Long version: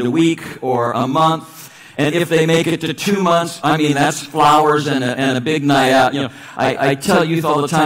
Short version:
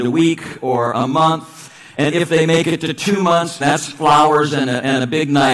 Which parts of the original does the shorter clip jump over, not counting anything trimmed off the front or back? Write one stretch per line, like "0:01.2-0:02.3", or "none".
0:03.6-0:03.9